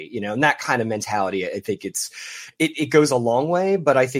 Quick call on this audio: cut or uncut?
uncut